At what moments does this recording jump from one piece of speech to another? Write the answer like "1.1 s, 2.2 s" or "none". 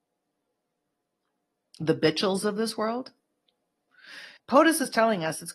1.7 s, 4.4 s